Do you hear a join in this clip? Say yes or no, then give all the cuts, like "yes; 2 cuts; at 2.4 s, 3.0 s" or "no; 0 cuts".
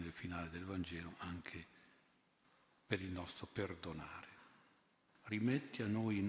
yes; 1 cut; at 5.1 s